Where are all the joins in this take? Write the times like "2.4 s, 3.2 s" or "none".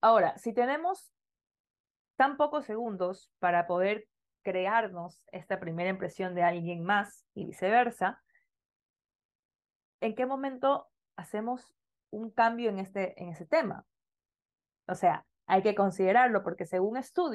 7.3 s

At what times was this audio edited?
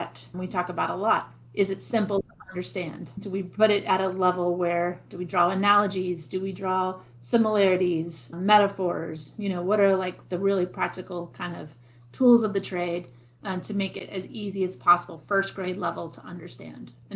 none

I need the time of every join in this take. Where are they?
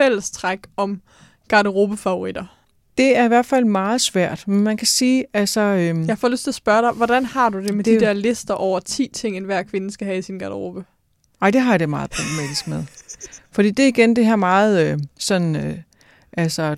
none

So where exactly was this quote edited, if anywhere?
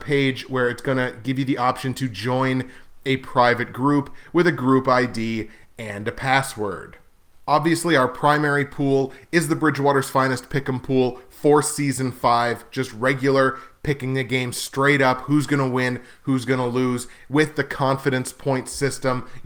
none

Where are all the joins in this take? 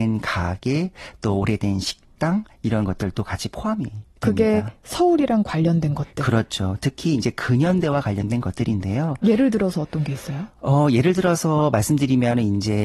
none

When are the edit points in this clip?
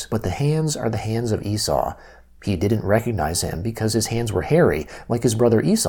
none

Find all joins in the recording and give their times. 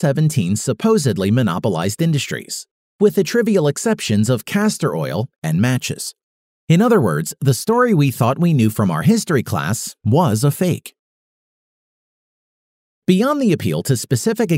13.0 s

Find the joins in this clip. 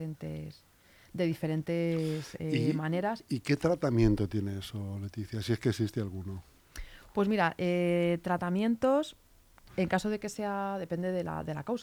none

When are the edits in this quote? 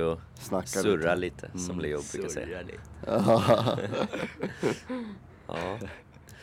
none

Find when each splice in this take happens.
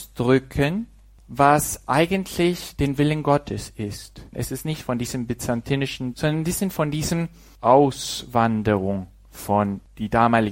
4.3 s, 6.1 s

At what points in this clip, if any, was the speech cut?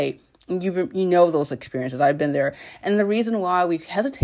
none

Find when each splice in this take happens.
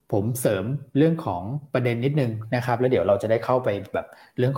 none

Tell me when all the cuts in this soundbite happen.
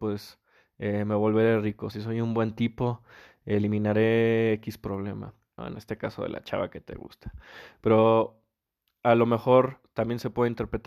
1.9 s, 5.6 s

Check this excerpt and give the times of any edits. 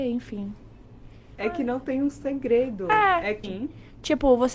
1.4 s, 3.4 s

